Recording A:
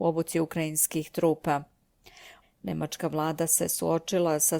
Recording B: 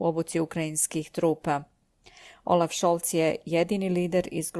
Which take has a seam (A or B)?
A